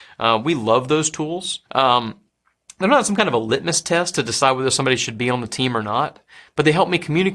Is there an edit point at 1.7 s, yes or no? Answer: yes